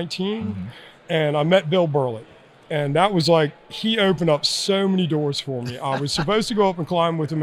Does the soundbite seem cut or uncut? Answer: uncut